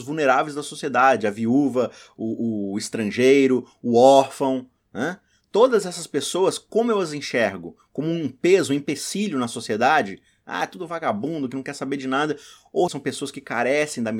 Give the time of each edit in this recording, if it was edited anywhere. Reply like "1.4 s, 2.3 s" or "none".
12.9 s